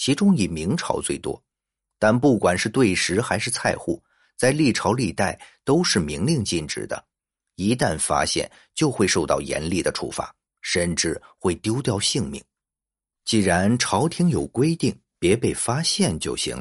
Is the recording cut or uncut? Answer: cut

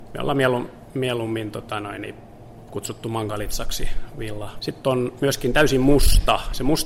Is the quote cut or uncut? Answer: cut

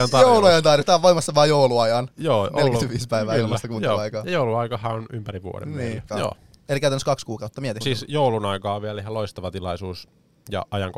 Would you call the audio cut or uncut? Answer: cut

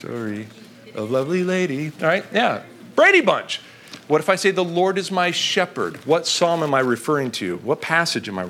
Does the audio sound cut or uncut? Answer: uncut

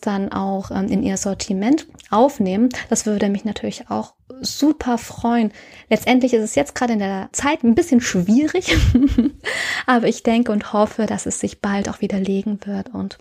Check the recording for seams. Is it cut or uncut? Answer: uncut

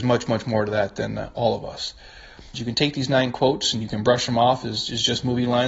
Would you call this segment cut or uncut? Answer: cut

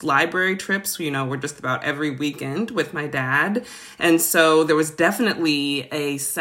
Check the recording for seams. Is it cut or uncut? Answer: uncut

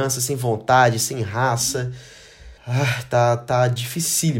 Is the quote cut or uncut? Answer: cut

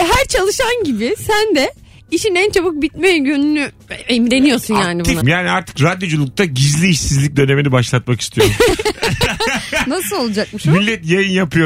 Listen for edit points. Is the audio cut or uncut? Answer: cut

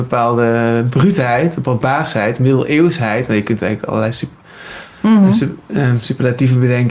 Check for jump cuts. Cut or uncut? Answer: uncut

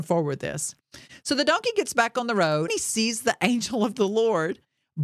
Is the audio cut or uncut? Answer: cut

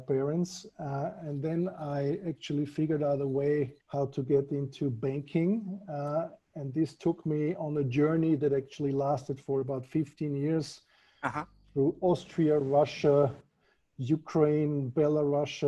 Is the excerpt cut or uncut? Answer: cut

